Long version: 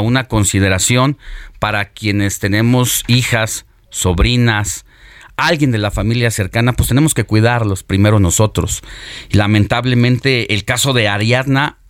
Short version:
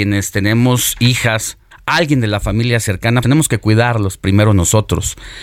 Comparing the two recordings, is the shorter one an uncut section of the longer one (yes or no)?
no